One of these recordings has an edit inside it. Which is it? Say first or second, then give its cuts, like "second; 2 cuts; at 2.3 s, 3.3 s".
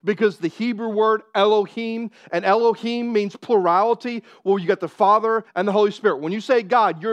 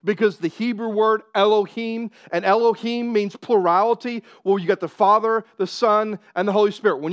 first; 1 cut; at 5.5 s